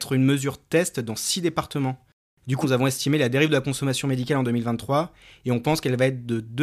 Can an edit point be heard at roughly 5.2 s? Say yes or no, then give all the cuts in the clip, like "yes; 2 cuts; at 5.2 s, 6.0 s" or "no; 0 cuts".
no; 1 cut; at 2.6 s